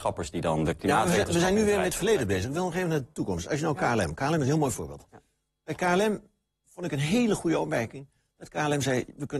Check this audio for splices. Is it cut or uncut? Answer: uncut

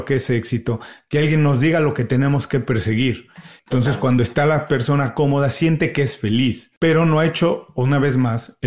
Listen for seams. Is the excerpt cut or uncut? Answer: cut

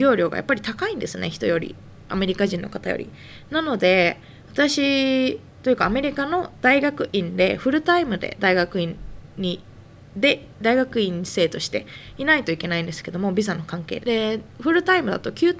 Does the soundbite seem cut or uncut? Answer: cut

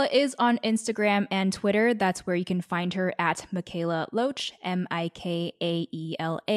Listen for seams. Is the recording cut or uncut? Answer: uncut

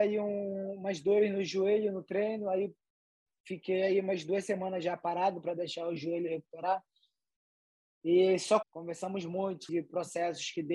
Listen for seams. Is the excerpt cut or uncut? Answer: cut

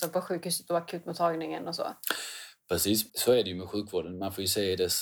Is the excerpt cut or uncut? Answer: cut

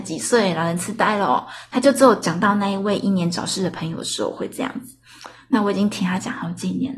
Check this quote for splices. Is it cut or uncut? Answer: uncut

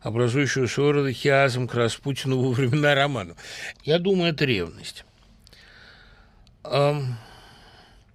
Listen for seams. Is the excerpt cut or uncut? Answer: cut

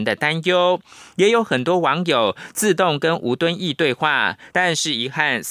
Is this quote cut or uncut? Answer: cut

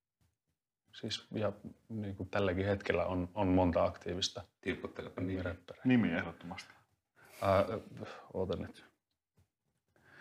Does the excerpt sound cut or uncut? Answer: cut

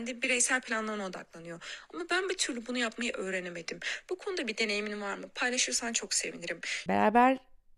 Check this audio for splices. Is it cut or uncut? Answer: cut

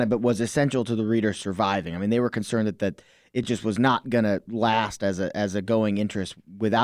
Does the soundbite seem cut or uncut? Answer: uncut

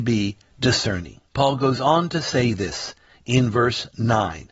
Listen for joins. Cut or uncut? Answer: uncut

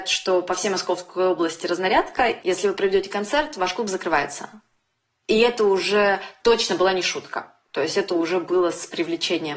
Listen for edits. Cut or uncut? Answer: uncut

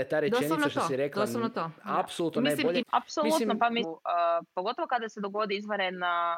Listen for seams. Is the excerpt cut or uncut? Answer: cut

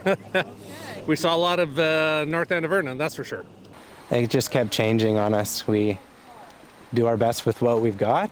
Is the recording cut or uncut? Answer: uncut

